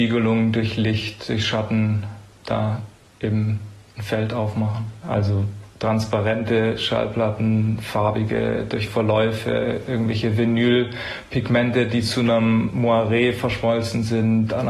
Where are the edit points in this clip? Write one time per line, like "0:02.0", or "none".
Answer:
0:05.0